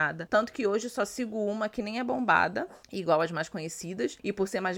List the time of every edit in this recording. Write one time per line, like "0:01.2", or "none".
0:02.8